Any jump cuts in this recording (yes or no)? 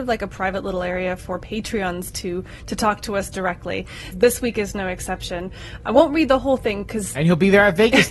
yes